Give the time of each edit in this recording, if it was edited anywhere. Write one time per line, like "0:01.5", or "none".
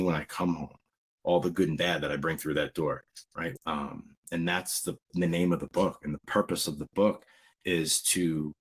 0:03.5